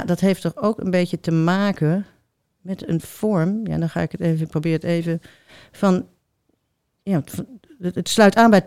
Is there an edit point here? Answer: no; 0 cuts

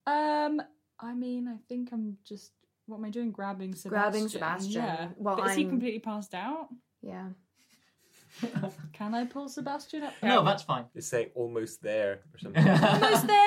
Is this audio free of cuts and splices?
no; 1 cut; at 10.2 s

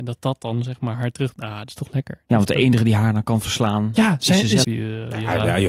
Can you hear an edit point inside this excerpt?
yes; 1 cut; at 4.6 s

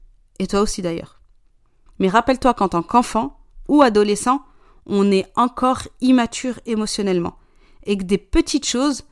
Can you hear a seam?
yes; 1 cut; at 1.9 s

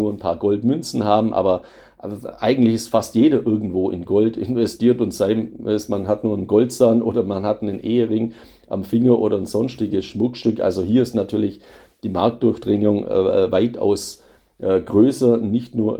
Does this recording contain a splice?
no; 0 cuts

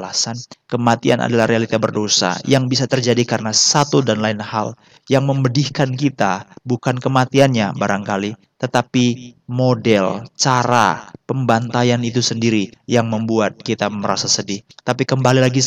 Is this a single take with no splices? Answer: yes; 0 cuts

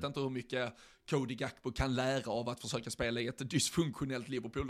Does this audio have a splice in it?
no; 0 cuts

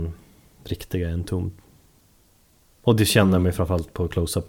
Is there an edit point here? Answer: no; 0 cuts

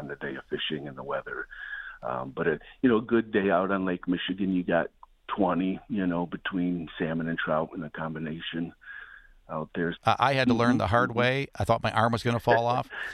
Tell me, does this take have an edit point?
yes; 1 cut; at 10.0 s

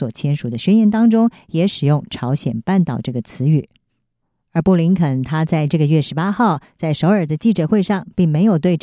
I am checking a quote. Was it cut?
no; 0 cuts

